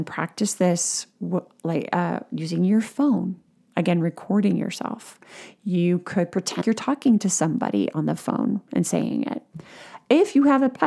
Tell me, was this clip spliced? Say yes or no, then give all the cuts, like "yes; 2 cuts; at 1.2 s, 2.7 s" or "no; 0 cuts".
yes; 1 cut; at 6.6 s